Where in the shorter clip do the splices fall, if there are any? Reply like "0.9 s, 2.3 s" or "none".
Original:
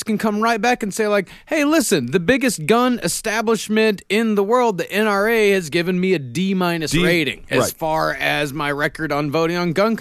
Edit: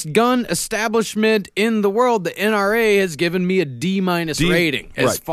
none